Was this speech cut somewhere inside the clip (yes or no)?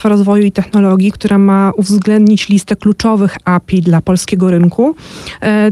yes